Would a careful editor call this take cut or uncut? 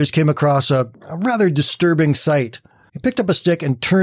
cut